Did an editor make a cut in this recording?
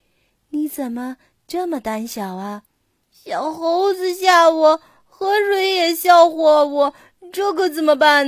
yes; 1 cut; at 3.0 s

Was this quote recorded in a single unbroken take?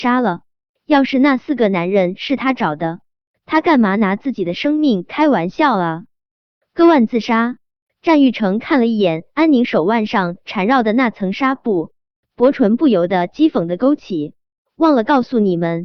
yes; 0 cuts

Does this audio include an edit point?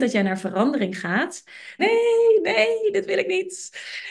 yes; 1 cut; at 1.8 s

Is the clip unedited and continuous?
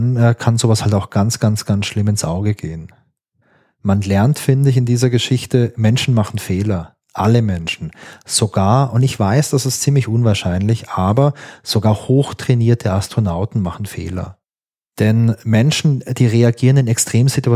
yes; 0 cuts

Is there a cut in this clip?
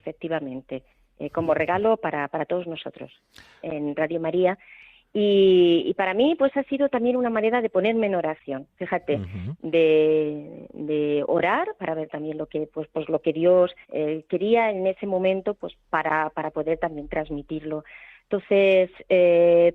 yes; 2 cuts; at 3.6 s, 13.8 s

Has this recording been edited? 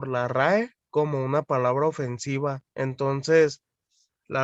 yes; 1 cut; at 2.7 s

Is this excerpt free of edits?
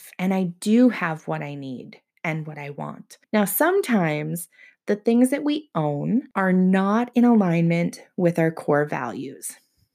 no; 2 cuts; at 3.2 s, 6.3 s

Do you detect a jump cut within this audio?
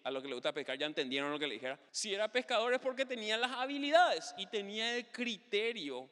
yes; 1 cut; at 1.9 s

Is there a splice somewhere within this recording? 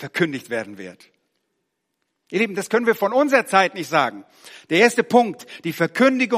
yes; 1 cut; at 2.2 s

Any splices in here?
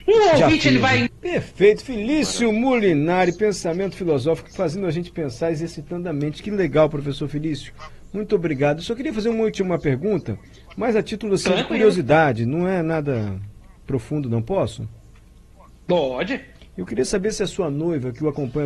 yes; 1 cut; at 1.1 s

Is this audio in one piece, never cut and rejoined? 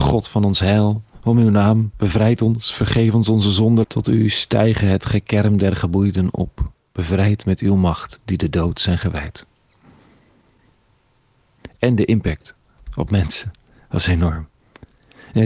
no; 2 cuts; at 3.8 s, 11.7 s

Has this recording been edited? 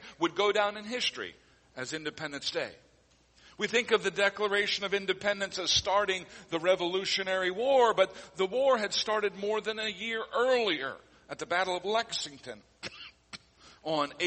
no; 0 cuts

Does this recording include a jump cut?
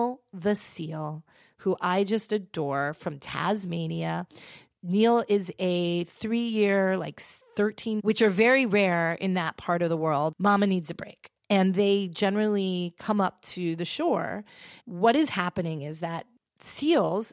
yes; 3 cuts; at 8.0 s, 10.3 s, 14.8 s

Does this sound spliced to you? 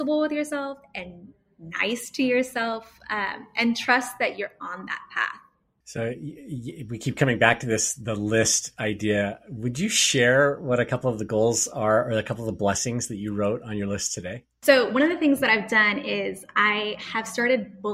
no; 0 cuts

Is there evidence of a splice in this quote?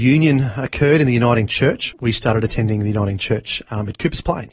no; 0 cuts

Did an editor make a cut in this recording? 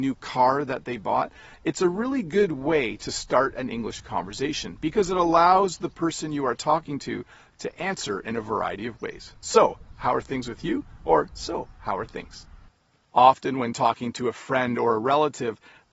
no; 0 cuts

